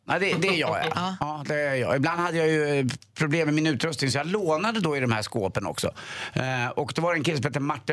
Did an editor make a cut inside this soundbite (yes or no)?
no